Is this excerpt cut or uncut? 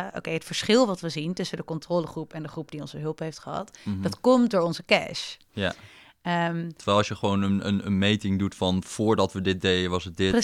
uncut